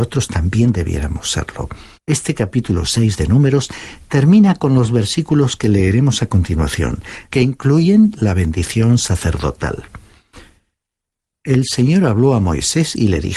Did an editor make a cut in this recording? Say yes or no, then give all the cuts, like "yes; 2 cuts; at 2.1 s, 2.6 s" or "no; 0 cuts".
yes; 2 cuts; at 1.9 s, 7.3 s